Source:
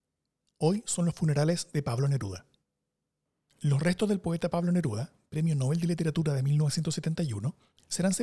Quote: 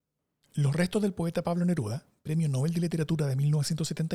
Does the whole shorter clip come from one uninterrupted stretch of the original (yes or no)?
yes